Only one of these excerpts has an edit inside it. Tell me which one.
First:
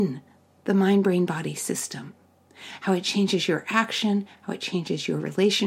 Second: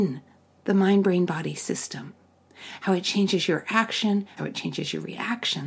second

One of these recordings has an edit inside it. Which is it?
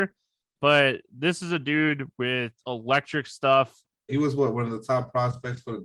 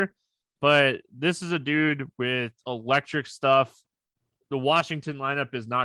first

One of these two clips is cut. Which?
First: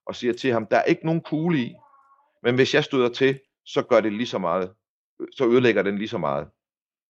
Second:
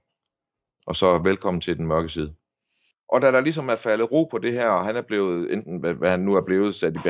second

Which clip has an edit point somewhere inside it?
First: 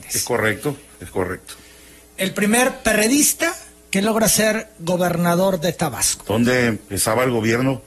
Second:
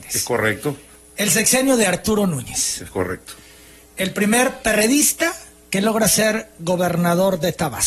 first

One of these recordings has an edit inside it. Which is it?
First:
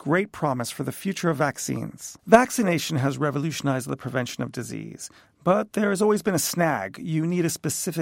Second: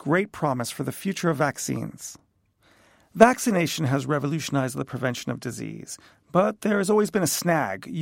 first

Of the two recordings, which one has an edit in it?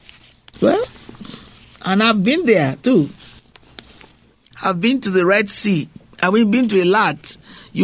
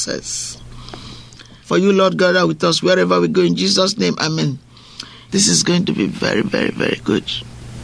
second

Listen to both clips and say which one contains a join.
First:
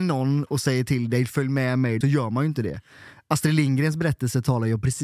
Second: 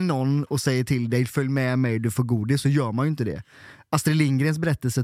first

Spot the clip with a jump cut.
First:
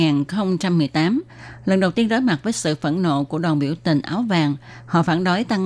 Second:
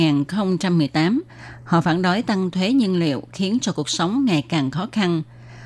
second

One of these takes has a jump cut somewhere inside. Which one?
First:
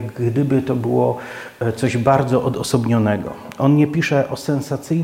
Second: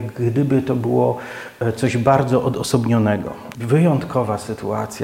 second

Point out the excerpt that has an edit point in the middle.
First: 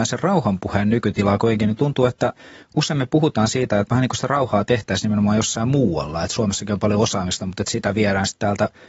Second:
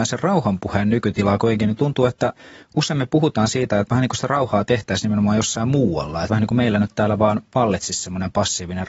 second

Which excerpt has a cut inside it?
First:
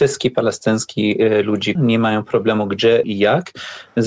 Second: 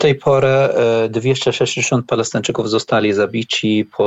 first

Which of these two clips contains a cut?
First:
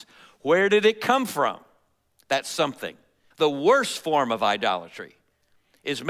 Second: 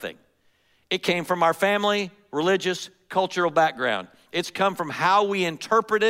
first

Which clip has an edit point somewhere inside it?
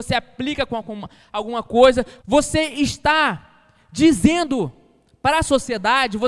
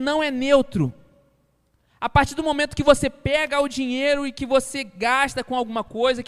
first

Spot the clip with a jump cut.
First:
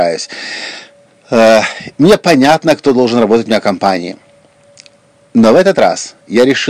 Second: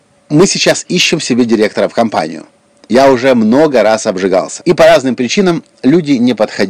second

